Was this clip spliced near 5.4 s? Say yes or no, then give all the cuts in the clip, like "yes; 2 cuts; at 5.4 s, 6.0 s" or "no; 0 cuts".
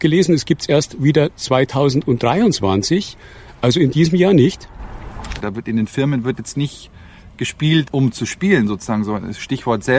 yes; 1 cut; at 5.4 s